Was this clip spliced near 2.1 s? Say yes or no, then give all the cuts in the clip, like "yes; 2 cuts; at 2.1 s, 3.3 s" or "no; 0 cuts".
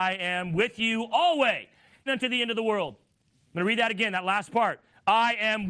yes; 1 cut; at 2.1 s